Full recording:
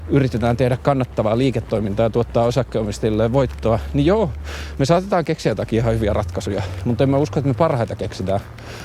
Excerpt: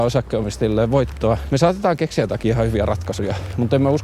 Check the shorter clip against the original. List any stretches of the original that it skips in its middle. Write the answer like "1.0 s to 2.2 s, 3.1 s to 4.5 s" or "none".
3.9 s to 4.8 s